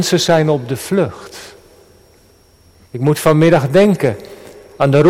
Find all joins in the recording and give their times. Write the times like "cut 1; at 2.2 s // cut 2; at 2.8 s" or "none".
cut 1; at 2.9 s